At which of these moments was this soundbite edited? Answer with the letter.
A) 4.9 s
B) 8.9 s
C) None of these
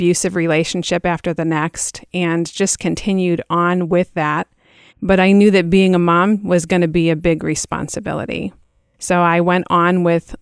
A